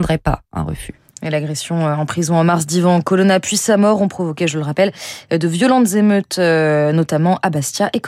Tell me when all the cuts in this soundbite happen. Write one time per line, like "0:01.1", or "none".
none